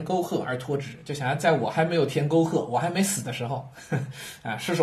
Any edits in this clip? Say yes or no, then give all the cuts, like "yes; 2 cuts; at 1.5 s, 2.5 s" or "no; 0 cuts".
no; 0 cuts